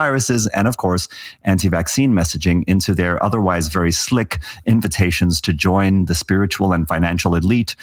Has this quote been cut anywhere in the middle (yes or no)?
no